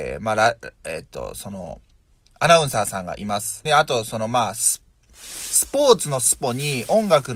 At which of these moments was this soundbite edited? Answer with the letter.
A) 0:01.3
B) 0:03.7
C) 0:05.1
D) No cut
B